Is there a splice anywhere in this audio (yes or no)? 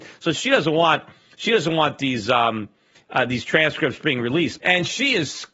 yes